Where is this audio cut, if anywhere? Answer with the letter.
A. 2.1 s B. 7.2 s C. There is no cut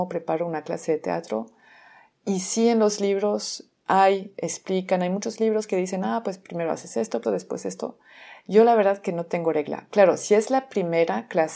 B